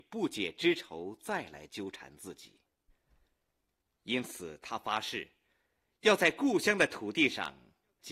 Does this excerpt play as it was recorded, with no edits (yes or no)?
yes